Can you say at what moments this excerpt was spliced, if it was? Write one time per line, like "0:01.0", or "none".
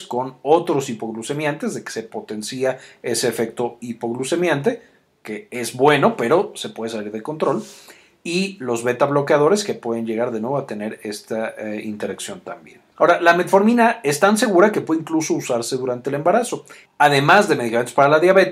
0:12.9
0:16.9